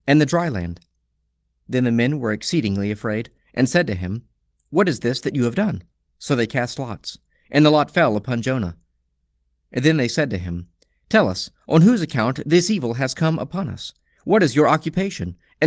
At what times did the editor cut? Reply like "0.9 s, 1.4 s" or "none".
6.1 s